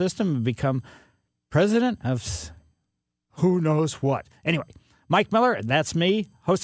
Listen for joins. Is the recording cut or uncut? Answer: uncut